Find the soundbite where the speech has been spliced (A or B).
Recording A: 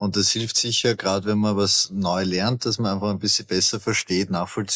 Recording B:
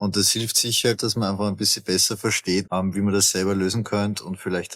B